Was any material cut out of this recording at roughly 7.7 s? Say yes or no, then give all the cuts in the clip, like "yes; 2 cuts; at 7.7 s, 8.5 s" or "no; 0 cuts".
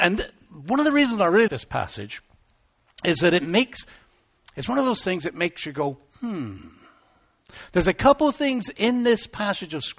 no; 1 cut; at 1.5 s